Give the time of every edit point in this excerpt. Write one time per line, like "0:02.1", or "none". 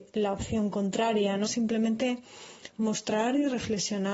0:01.4
0:02.7